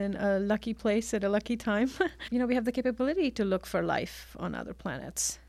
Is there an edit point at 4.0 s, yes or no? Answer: no